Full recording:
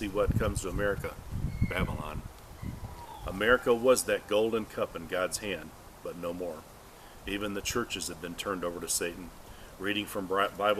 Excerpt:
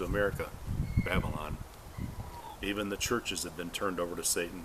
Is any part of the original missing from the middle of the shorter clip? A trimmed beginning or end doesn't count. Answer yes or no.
yes